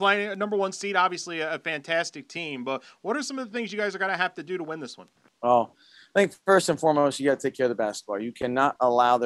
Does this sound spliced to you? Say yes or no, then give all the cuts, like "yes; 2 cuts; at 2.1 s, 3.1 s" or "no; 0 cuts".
no; 0 cuts